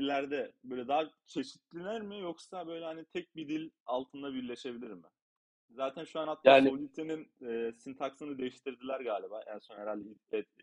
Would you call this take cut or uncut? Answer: uncut